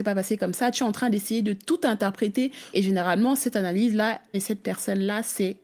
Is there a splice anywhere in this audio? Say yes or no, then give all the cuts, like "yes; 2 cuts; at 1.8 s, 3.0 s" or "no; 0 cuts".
yes; 2 cuts; at 2.7 s, 4.3 s